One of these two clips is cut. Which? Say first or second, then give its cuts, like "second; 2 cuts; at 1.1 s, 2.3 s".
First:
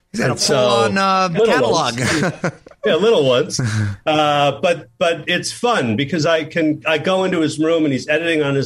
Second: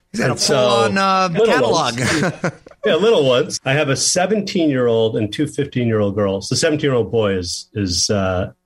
second; 1 cut; at 3.6 s